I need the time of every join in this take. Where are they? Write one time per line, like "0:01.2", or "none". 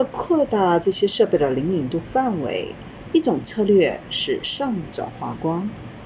0:03.1